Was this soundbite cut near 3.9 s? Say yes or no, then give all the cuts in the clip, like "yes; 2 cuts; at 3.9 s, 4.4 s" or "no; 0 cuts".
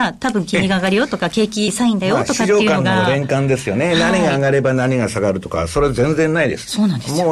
no; 1 cut; at 1.7 s